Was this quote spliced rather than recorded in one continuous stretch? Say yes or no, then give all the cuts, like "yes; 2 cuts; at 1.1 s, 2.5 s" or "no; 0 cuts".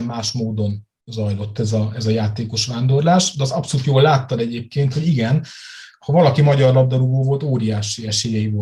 no; 0 cuts